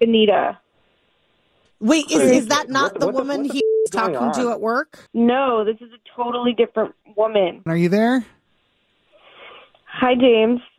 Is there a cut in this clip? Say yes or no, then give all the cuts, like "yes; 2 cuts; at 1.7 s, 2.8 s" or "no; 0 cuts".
yes; 2 cuts; at 5.1 s, 7.7 s